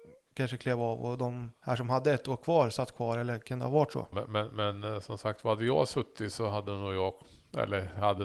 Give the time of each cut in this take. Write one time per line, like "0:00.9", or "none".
0:01.6
0:04.1